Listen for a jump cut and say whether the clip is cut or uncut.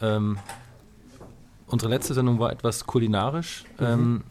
uncut